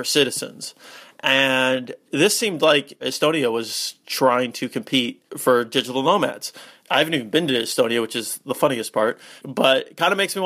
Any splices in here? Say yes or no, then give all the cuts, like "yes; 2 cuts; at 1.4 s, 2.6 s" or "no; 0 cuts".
no; 0 cuts